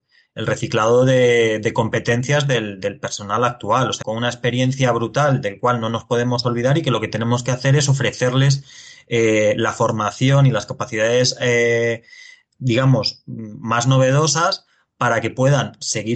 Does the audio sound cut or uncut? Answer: cut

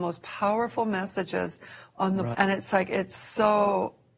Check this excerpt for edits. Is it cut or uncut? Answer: cut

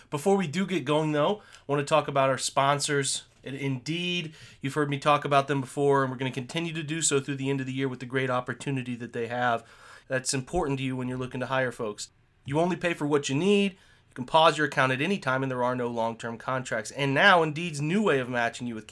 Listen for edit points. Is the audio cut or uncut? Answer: cut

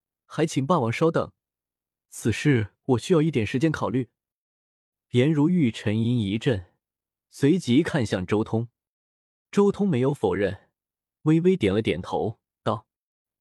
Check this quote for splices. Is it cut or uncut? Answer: cut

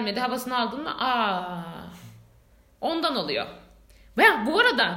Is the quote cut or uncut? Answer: uncut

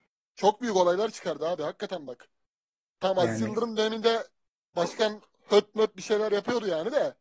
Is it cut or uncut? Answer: cut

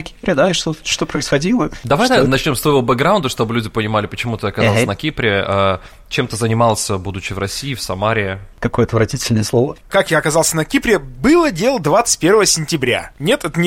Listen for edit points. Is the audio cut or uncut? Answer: cut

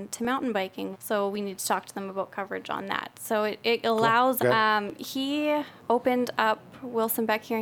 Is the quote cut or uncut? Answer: cut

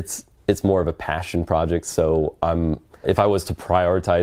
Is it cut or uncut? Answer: cut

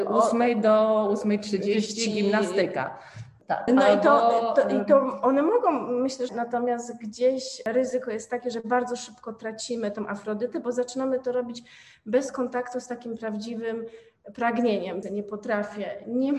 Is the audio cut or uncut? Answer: cut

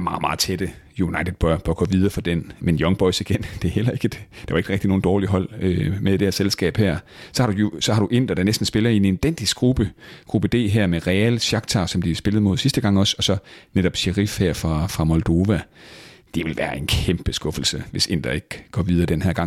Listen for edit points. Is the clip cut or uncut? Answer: uncut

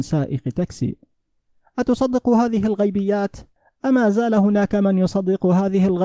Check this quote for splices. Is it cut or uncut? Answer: uncut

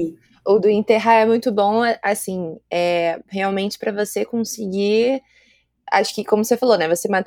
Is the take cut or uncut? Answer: uncut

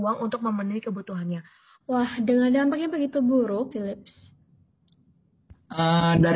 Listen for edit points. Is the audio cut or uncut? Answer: cut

